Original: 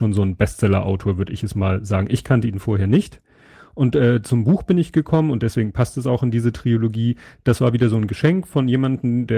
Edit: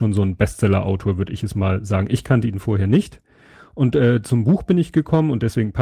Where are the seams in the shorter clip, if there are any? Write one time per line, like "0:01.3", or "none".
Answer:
none